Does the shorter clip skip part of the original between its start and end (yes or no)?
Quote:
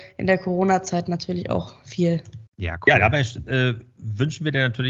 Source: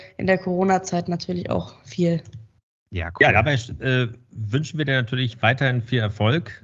yes